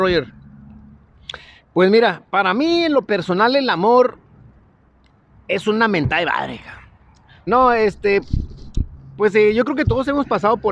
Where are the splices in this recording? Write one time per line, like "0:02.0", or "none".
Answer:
0:07.5